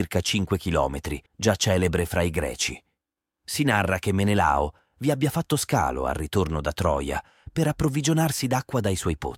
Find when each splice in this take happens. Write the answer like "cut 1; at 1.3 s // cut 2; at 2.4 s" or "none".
cut 1; at 1.3 s